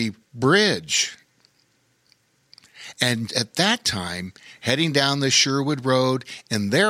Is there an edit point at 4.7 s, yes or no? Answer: no